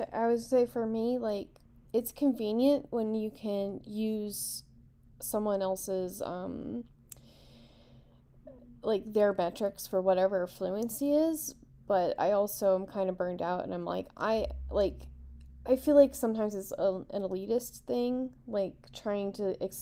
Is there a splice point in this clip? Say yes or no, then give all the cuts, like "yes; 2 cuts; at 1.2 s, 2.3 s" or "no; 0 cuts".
no; 0 cuts